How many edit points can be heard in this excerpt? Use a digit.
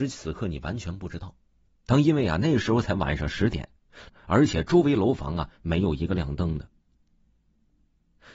2